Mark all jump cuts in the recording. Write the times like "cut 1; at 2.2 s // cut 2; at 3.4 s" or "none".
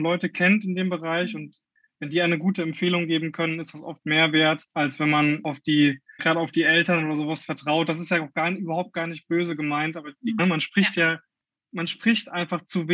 cut 1; at 6.2 s // cut 2; at 10.4 s